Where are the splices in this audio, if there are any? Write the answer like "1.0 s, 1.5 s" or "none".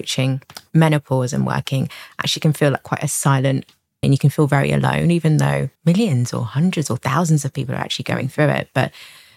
4.0 s, 5.8 s